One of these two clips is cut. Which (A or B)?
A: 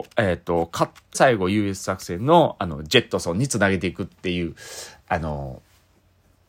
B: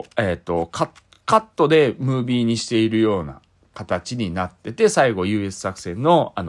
A